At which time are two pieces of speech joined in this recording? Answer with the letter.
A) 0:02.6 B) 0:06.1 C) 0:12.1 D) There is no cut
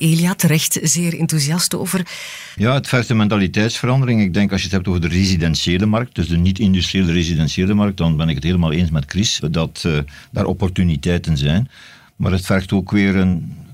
A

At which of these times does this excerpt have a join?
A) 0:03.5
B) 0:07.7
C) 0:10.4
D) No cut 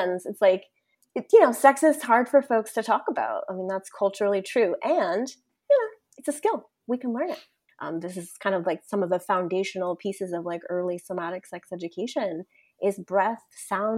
B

